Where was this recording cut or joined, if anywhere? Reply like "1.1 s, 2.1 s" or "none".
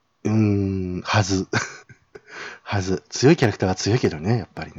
1.8 s